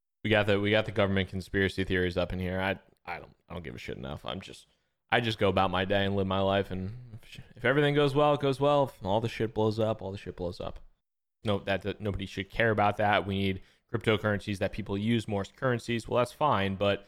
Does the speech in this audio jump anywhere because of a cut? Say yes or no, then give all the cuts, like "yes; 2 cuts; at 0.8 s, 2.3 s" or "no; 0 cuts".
yes; 1 cut; at 11.4 s